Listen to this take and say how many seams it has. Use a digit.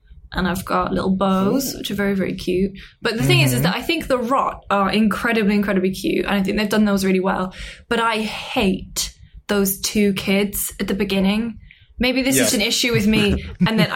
1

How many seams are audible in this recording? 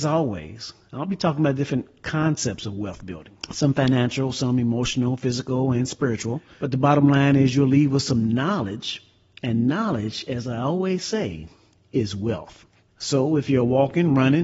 1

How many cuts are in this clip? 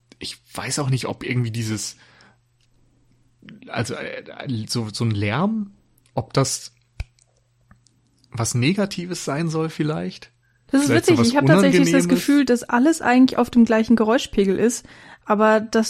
1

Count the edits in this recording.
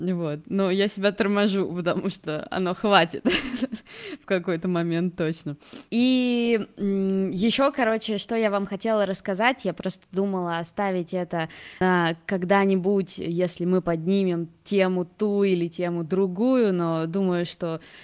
1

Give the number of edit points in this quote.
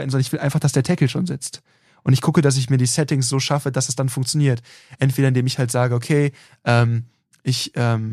0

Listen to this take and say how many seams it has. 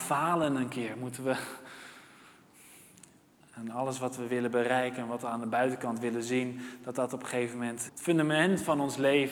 2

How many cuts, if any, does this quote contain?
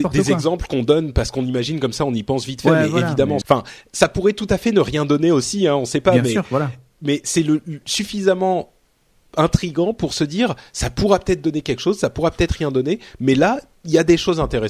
1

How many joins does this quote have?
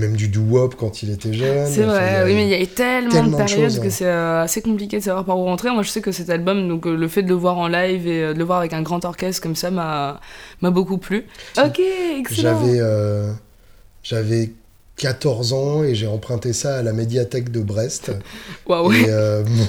1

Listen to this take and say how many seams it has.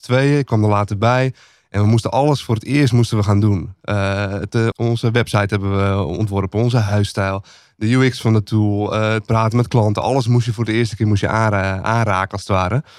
1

